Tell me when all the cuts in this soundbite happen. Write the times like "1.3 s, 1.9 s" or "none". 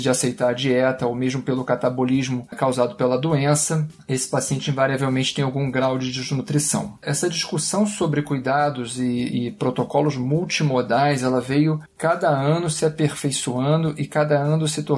none